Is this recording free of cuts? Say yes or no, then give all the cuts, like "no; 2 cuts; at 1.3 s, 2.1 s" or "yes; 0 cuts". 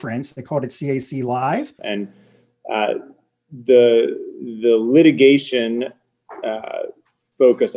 no; 1 cut; at 1.8 s